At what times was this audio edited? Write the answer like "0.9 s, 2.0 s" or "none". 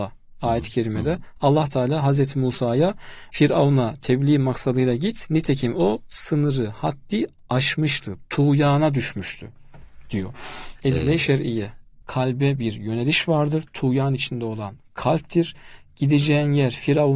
10.8 s, 12.0 s